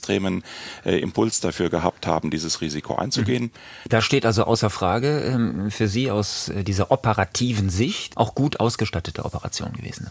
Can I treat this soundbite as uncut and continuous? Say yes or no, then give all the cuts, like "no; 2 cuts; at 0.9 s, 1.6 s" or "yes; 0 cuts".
no; 2 cuts; at 3.9 s, 8.1 s